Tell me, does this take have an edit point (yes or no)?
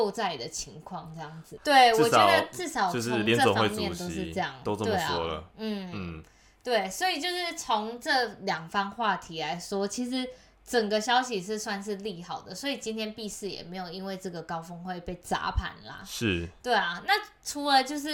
yes